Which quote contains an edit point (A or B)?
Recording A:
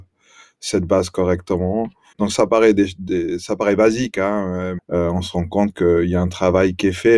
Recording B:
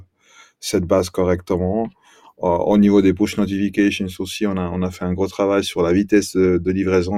A